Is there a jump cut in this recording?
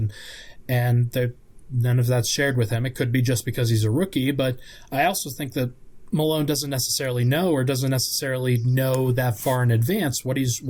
no; 0 cuts

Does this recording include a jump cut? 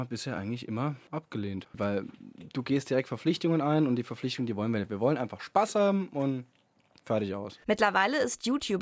no; 0 cuts

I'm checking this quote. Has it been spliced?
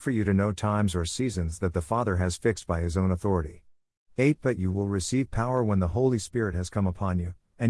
no; 0 cuts

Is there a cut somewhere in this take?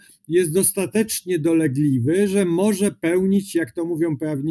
no; 0 cuts

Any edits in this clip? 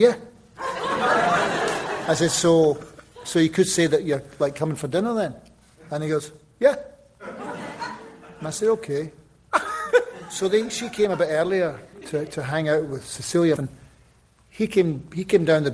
yes; 1 cut; at 13.6 s

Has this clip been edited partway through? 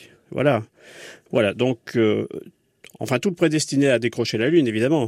yes; 1 cut; at 1.3 s

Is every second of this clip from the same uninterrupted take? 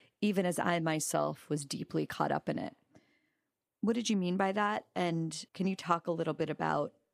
no; 1 cut; at 5.5 s

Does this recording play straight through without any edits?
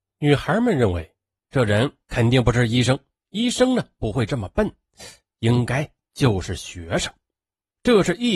yes; 0 cuts

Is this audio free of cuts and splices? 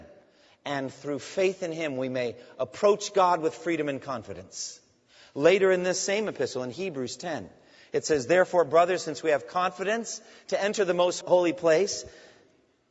no; 1 cut; at 11.2 s

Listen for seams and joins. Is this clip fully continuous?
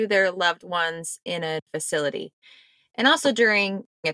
yes; 0 cuts

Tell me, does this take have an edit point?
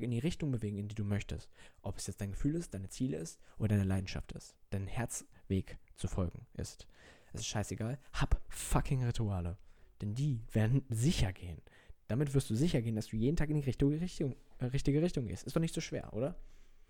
no; 0 cuts

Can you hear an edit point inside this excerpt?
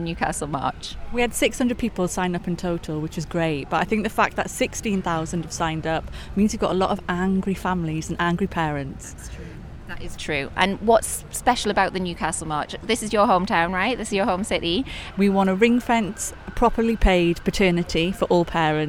yes; 2 cuts; at 10.2 s, 15.1 s

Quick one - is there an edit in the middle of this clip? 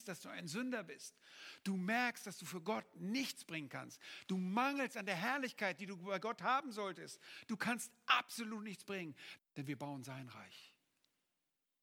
yes; 1 cut; at 9.4 s

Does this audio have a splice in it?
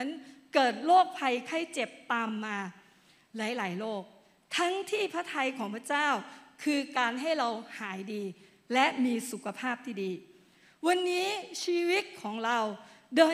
no; 0 cuts

